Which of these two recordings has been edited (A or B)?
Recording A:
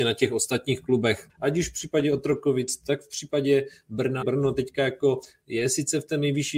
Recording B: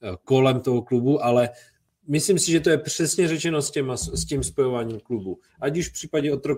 A